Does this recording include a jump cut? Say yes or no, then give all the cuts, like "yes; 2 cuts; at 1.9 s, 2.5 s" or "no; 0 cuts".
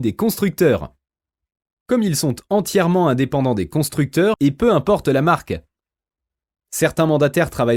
yes; 1 cut; at 4.3 s